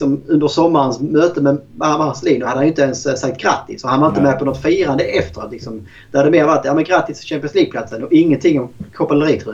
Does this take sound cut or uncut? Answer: uncut